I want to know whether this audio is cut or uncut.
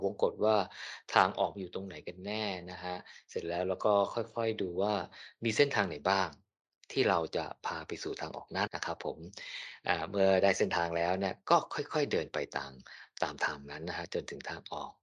cut